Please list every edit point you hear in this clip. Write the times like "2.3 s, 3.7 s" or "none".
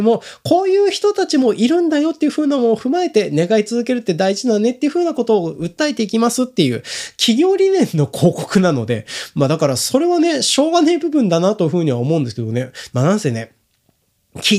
12.9 s

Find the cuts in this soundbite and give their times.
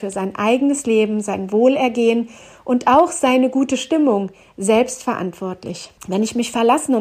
6.0 s

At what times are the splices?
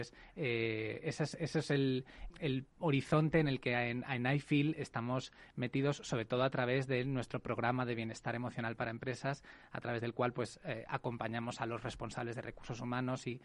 2.3 s

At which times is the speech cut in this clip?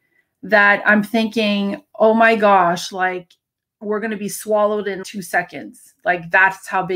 5.0 s

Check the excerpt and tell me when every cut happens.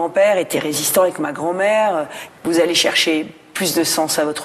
2.3 s

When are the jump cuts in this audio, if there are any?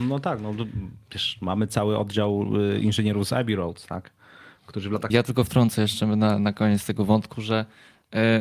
5.1 s

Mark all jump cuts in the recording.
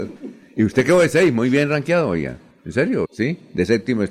3.1 s

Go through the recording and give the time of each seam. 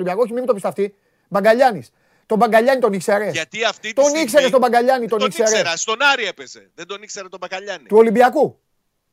none

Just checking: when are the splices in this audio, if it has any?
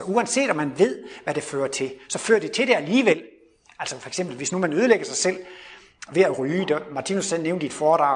none

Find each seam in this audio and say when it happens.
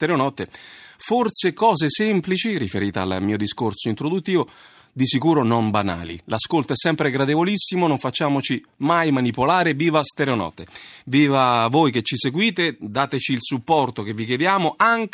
none

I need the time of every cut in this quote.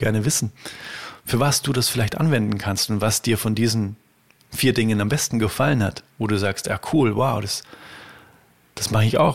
none

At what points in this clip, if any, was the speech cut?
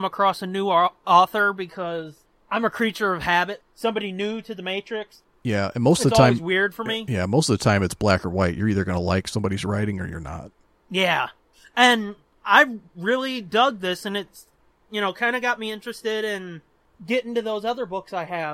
3.6 s

